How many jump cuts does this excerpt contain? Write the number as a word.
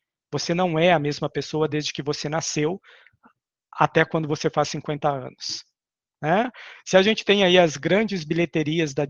one